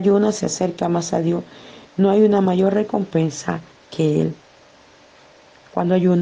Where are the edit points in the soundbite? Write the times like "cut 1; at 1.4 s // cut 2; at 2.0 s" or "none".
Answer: none